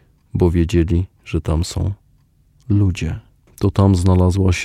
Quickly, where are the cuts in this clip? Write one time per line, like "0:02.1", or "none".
0:03.5